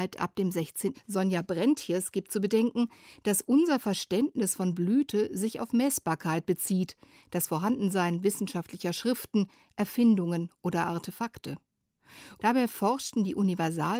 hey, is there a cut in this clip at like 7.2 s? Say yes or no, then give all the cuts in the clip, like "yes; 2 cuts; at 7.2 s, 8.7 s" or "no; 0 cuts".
no; 2 cuts; at 0.9 s, 12.4 s